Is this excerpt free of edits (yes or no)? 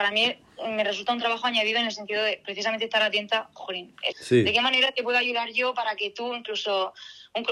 no